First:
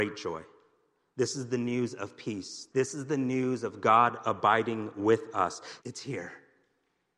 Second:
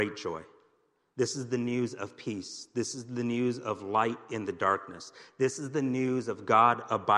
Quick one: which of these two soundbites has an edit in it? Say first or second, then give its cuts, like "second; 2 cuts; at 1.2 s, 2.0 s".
first; 2 cuts; at 2.7 s, 5.8 s